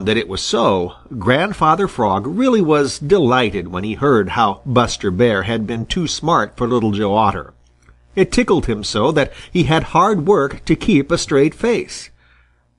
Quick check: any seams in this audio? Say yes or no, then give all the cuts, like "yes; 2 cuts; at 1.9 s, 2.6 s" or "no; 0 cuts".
no; 0 cuts